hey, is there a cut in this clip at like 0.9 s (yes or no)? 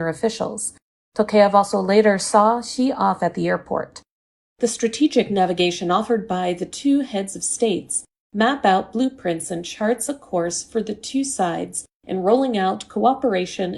no